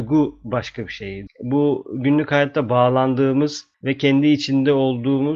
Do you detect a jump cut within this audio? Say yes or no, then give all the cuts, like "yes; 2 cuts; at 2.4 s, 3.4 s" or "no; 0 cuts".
yes; 2 cuts; at 1.3 s, 3.7 s